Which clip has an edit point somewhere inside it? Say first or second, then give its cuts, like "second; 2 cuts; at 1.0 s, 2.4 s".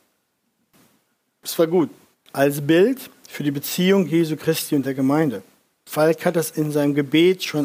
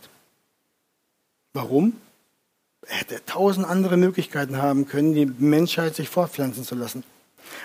first; 1 cut; at 2.1 s